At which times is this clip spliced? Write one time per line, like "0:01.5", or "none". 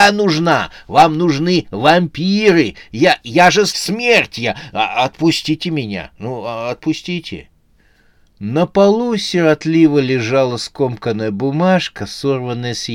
0:03.7